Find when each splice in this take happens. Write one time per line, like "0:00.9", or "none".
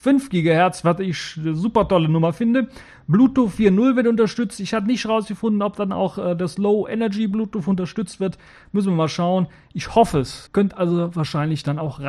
0:10.5